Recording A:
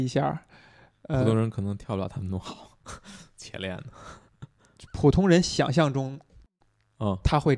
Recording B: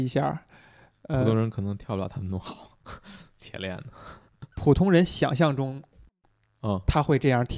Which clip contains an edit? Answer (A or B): B